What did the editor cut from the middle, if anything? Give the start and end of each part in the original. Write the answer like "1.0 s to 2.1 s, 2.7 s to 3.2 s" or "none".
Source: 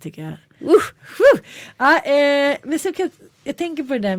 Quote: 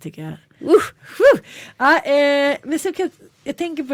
none